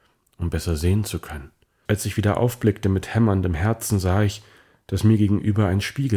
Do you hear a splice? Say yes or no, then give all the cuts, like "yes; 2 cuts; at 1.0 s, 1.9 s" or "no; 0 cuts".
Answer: yes; 1 cut; at 1.9 s